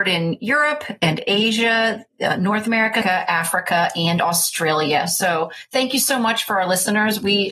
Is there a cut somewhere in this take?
yes; 1 cut; at 3.0 s

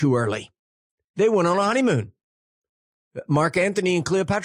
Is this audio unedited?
no; 1 cut; at 1.1 s

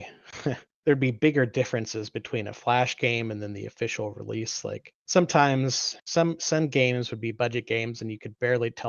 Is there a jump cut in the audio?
yes; 1 cut; at 6.0 s

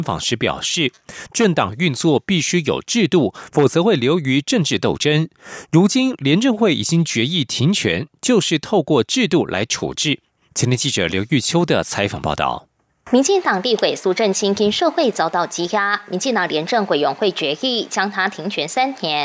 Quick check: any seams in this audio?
no; 0 cuts

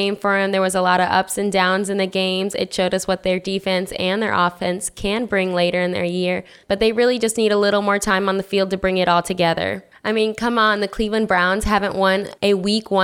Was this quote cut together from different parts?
no; 0 cuts

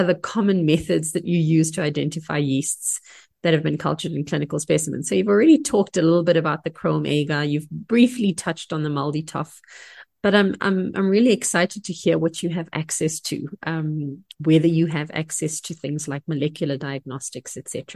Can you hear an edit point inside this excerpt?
no; 0 cuts

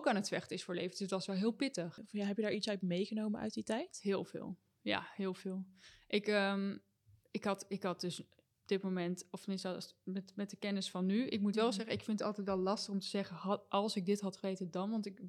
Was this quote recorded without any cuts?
yes; 0 cuts

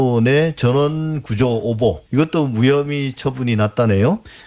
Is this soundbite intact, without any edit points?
no; 1 cut; at 2.1 s

